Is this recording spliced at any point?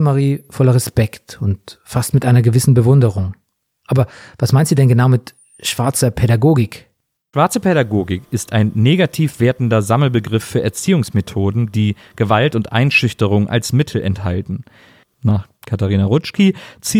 yes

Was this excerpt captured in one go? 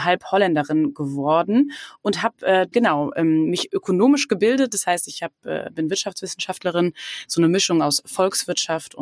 no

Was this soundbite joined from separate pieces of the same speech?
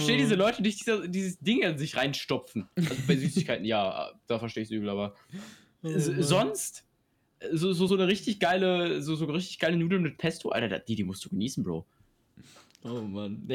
no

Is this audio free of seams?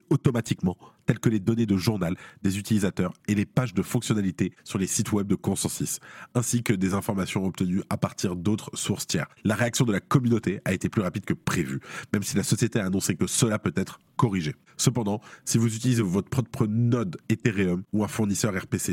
yes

